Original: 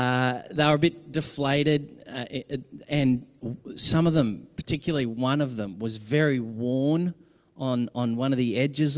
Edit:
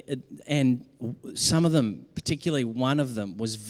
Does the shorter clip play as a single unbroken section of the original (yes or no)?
yes